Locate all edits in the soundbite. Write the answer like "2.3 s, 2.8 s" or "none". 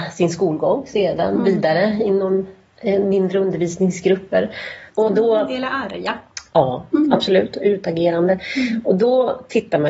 4.9 s